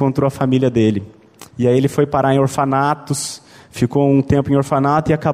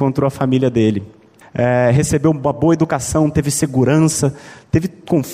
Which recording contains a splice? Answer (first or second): second